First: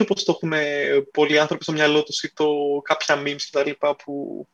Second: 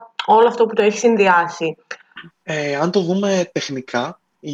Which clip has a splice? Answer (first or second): second